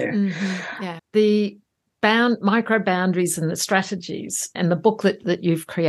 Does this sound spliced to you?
yes; 2 cuts; at 1.0 s, 4.6 s

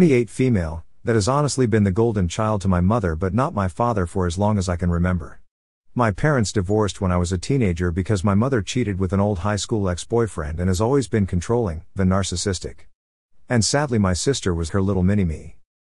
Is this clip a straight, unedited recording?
no; 2 cuts; at 12.0 s, 14.7 s

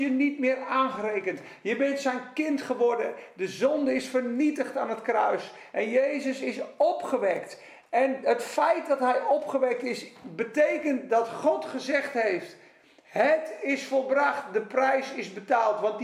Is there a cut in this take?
no; 0 cuts

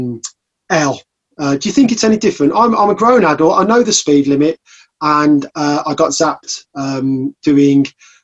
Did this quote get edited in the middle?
no; 0 cuts

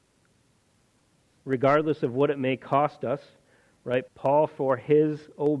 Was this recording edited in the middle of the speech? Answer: yes; 1 cut; at 4.1 s

